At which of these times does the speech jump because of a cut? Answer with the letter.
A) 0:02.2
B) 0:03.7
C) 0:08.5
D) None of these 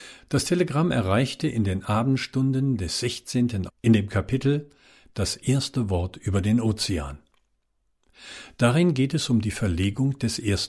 B